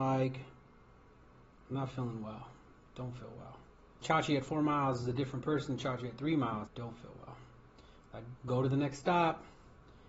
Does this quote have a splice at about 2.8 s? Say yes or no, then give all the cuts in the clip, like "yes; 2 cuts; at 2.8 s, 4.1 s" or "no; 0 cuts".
no; 3 cuts; at 4.0 s, 6.7 s, 8.4 s